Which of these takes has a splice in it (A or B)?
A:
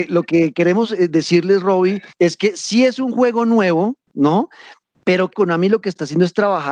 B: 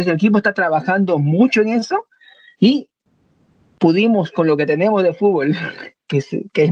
A